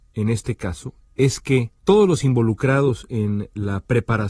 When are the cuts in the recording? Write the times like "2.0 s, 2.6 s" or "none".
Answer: 1.8 s